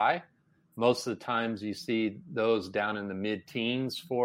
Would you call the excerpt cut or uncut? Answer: uncut